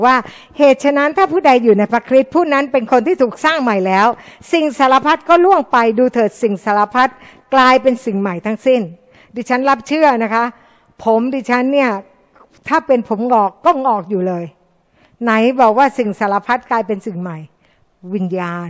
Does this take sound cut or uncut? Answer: uncut